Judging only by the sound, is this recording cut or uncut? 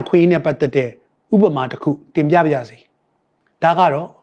uncut